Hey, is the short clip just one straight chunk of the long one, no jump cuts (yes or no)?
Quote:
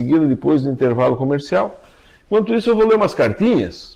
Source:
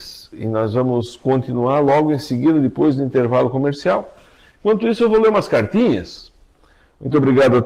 yes